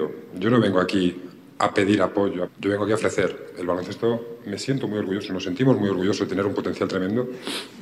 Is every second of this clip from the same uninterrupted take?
no; 1 cut; at 2.5 s

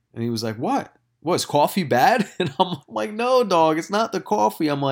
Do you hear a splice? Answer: yes; 1 cut; at 2.8 s

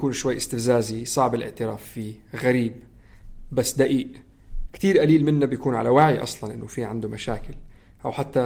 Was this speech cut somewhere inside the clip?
yes; 1 cut; at 4.6 s

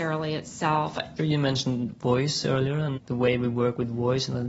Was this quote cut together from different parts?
yes; 2 cuts; at 1.2 s, 2.9 s

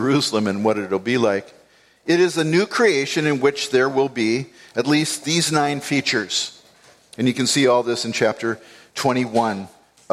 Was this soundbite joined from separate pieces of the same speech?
no; 0 cuts

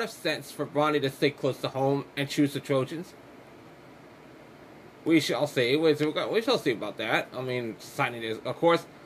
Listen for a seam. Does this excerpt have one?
no; 0 cuts

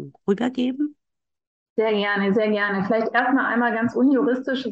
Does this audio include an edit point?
no; 0 cuts

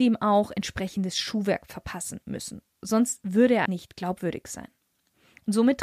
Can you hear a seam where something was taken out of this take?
yes; 1 cut; at 3.7 s

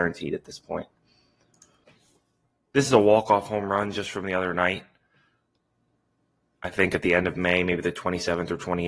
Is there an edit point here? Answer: no; 0 cuts

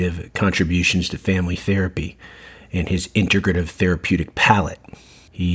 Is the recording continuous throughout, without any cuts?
yes; 0 cuts

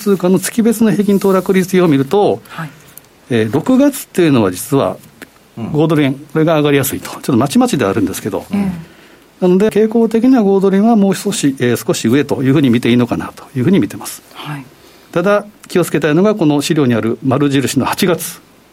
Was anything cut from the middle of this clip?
yes; 2 cuts; at 5.4 s, 9.7 s

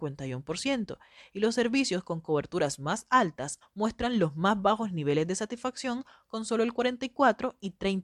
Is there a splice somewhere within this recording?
yes; 1 cut; at 3.6 s

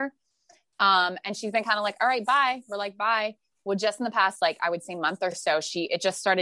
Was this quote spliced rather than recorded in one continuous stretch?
no; 0 cuts

